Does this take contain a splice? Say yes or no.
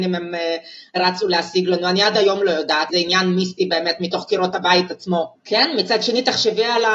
yes